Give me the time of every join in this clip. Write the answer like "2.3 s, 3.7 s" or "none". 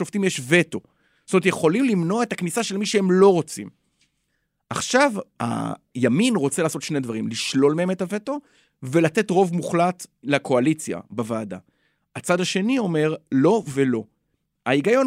none